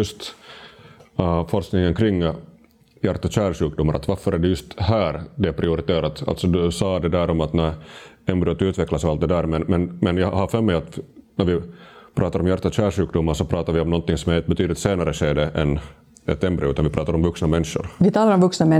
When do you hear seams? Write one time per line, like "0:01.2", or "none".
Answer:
none